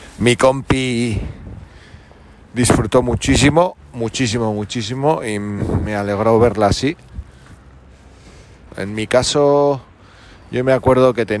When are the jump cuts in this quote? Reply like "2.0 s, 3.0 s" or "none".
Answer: 8.7 s